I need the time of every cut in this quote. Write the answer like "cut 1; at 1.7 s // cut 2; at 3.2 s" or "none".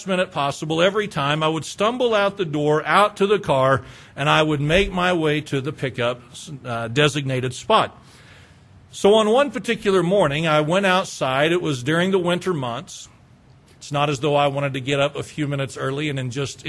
cut 1; at 13.7 s